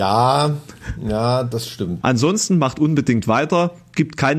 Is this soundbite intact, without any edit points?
no; 1 cut; at 2.0 s

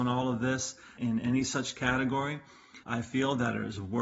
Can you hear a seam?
yes; 2 cuts; at 1.0 s, 2.8 s

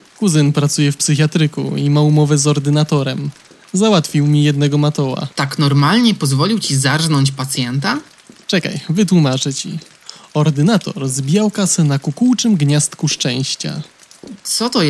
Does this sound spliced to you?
yes; 1 cut; at 5.3 s

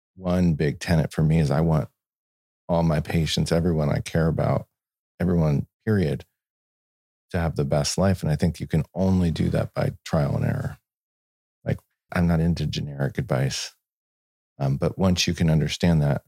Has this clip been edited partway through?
yes; 2 cuts; at 5.7 s, 12.1 s

